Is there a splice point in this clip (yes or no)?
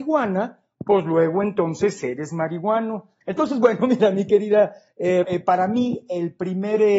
yes